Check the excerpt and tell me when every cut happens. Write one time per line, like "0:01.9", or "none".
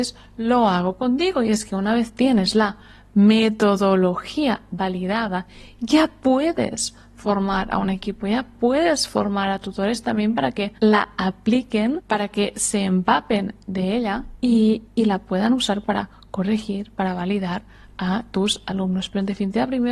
none